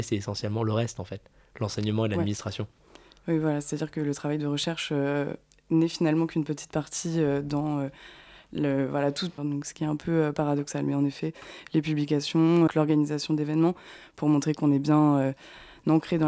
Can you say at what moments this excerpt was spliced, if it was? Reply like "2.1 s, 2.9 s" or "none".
9.4 s, 12.7 s